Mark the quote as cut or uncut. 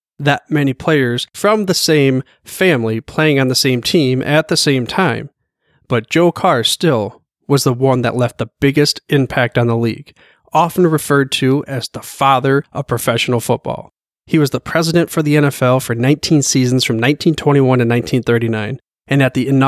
uncut